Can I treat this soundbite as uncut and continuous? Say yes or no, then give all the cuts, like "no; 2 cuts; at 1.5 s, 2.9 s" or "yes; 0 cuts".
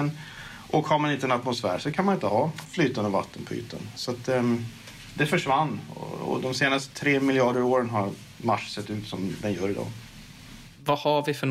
yes; 0 cuts